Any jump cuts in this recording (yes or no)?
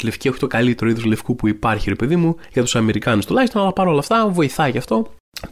no